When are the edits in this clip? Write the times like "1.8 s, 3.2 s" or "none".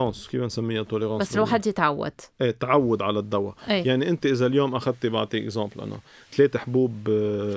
none